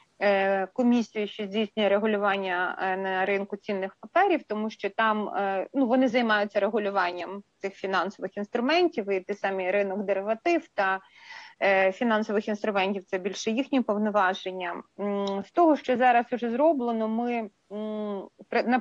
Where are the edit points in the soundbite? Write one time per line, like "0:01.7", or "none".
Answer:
none